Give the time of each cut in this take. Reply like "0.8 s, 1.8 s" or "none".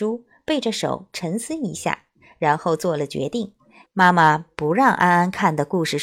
3.8 s